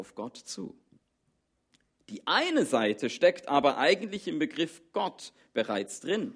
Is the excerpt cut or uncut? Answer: uncut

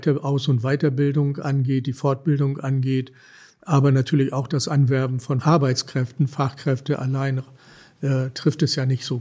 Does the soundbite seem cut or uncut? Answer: uncut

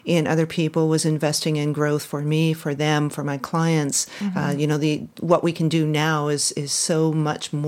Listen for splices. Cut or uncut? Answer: uncut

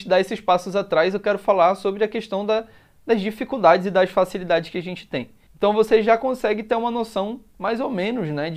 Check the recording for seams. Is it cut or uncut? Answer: cut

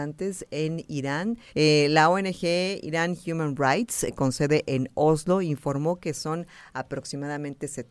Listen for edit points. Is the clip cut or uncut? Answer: cut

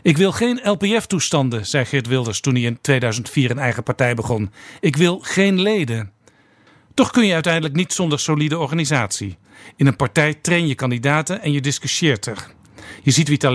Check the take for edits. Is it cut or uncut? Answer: uncut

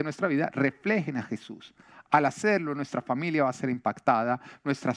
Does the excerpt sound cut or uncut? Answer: uncut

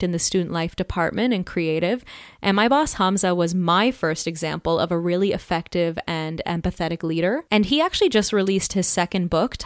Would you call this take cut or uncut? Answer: uncut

